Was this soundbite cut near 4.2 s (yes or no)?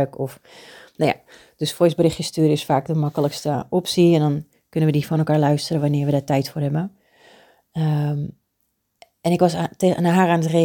no